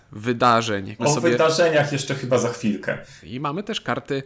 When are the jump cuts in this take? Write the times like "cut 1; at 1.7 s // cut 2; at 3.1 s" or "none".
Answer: cut 1; at 1.0 s // cut 2; at 3.2 s